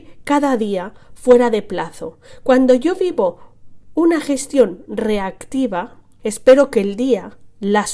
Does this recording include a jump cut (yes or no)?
yes